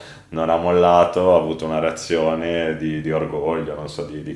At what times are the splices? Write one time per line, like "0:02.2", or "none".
none